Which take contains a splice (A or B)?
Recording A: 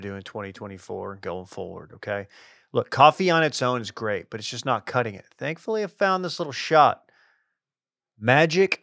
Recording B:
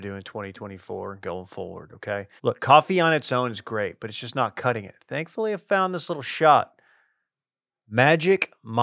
B